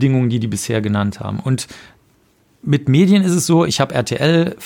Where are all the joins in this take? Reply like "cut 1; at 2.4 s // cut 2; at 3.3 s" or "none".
cut 1; at 3.7 s